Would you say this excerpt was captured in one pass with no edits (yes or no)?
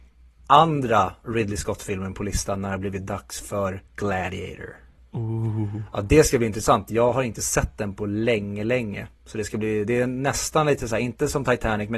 no